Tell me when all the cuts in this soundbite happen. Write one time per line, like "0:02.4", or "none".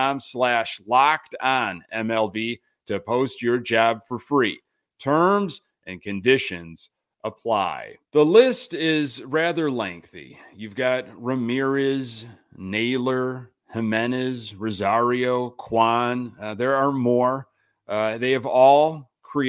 0:08.1